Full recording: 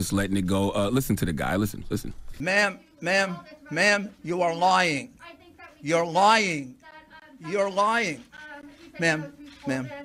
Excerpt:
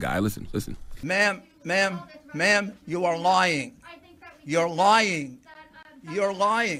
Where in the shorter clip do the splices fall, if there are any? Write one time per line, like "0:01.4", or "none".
none